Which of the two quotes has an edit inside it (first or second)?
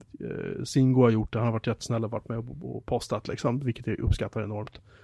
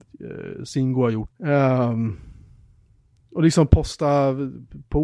second